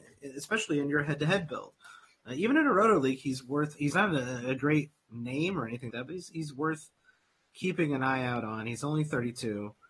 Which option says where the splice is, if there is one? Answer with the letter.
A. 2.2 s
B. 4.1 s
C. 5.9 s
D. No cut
C